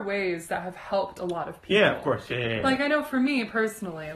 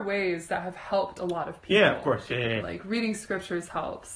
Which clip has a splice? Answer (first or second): second